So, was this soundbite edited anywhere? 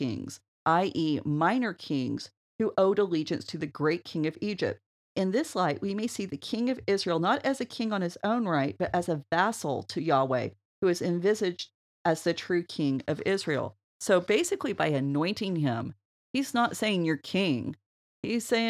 no; 0 cuts

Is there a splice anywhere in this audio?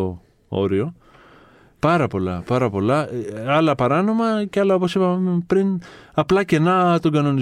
yes; 1 cut; at 1.7 s

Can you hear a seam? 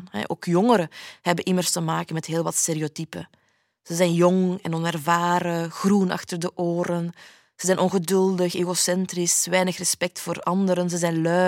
no; 0 cuts

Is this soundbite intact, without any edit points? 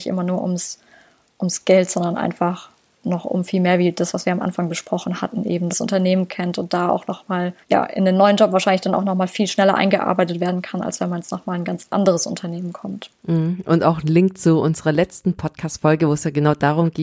no; 2 cuts; at 5.7 s, 7.6 s

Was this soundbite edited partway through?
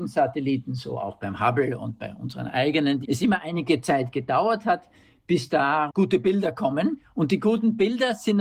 yes; 2 cuts; at 3.0 s, 5.9 s

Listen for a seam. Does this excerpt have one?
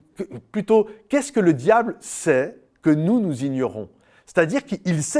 no; 0 cuts

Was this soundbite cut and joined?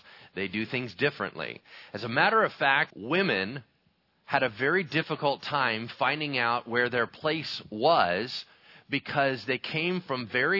yes; 1 cut; at 2.9 s

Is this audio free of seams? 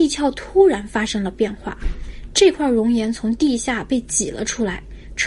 yes; 0 cuts

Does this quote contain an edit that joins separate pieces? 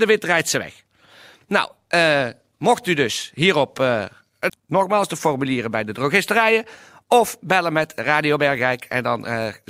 yes; 1 cut; at 4.5 s

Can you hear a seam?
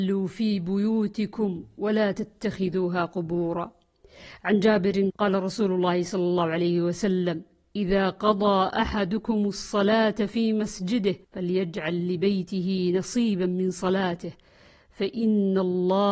yes; 2 cuts; at 5.1 s, 11.2 s

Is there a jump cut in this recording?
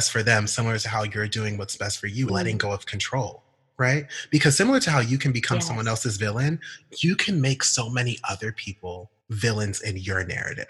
yes; 2 cuts; at 2.3 s, 9.2 s

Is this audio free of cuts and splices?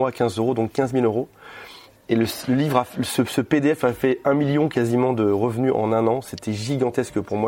yes; 0 cuts

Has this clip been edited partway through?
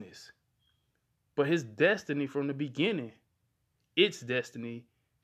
no; 0 cuts

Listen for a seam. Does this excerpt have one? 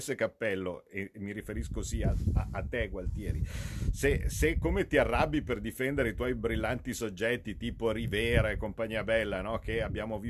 no; 0 cuts

